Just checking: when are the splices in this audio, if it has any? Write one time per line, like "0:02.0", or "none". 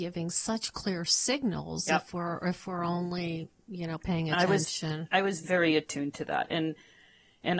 0:05.4